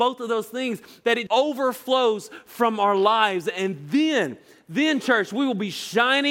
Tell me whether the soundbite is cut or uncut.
cut